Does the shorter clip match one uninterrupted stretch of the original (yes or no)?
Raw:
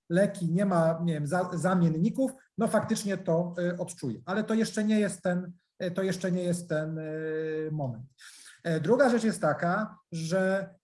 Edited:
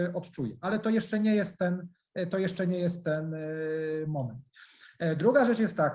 yes